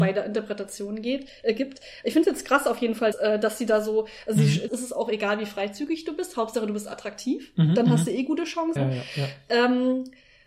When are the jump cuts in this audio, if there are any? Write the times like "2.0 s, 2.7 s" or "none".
3.1 s, 4.7 s, 8.8 s